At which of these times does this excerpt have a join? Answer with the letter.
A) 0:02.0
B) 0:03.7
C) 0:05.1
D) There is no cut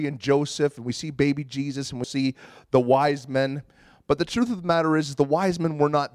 A